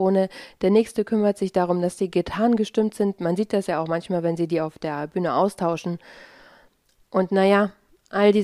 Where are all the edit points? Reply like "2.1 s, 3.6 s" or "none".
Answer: none